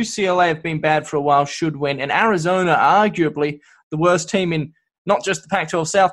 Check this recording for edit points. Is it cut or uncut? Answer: uncut